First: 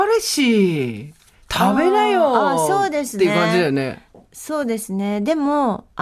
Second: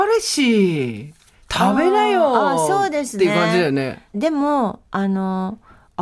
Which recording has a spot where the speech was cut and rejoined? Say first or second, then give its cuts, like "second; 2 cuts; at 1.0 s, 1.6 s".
second; 1 cut; at 4.1 s